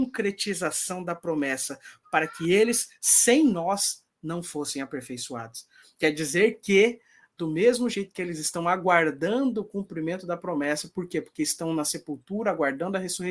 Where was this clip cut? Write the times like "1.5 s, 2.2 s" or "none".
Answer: 2.0 s